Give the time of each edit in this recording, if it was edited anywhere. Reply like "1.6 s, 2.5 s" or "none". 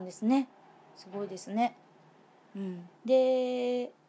2.9 s